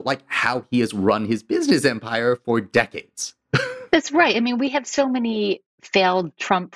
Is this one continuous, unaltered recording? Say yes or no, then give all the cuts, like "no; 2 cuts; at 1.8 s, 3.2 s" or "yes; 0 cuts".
yes; 0 cuts